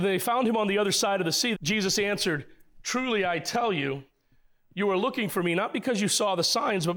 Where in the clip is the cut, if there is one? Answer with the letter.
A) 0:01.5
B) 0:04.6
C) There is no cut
A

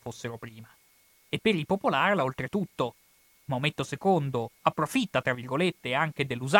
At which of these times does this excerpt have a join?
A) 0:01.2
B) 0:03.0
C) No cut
C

